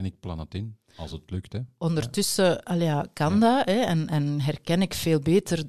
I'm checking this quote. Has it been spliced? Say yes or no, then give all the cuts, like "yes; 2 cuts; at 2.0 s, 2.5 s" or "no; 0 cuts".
no; 0 cuts